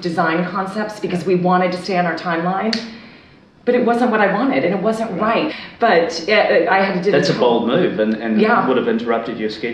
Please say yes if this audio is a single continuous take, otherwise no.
no